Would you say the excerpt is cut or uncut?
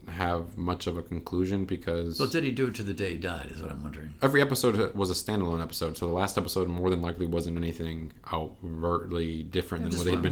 uncut